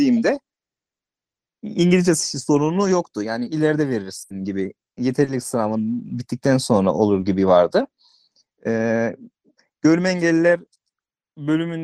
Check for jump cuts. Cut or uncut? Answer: uncut